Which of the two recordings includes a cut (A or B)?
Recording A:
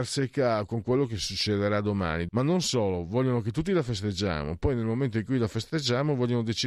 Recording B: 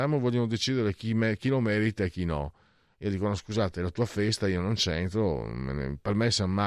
A